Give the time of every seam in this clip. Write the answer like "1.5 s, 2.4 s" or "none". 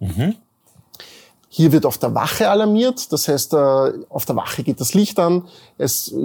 1.5 s